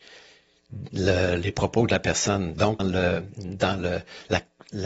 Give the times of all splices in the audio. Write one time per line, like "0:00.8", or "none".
0:02.8